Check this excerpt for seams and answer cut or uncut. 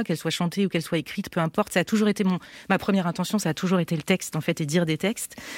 uncut